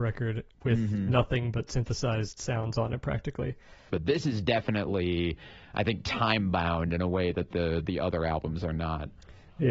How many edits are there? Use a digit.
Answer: 1